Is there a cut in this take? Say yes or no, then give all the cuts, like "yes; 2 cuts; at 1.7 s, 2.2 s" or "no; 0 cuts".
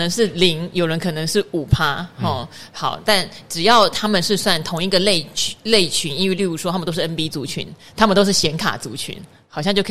yes; 1 cut; at 6.4 s